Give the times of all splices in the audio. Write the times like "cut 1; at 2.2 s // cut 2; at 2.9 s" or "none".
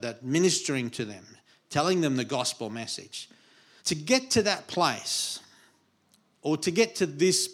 cut 1; at 3.8 s